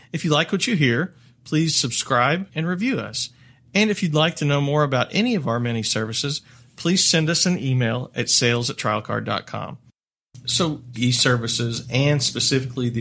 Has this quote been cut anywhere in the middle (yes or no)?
yes